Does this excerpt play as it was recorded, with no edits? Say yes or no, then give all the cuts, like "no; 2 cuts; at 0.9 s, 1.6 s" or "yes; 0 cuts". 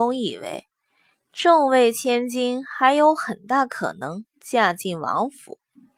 yes; 0 cuts